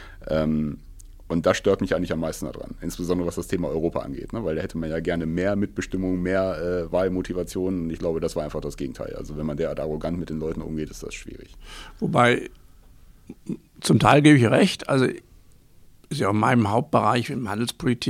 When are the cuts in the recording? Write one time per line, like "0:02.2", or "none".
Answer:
none